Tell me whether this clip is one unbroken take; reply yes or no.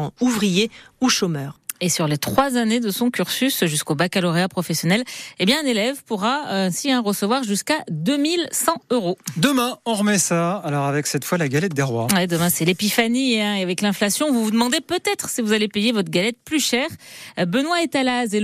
yes